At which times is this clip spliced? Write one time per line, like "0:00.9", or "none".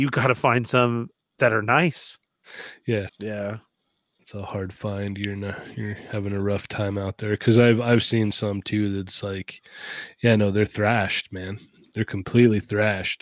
0:03.1